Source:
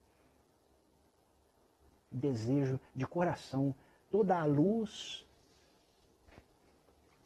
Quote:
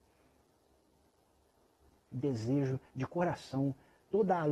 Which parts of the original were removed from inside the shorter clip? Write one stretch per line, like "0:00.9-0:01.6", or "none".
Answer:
none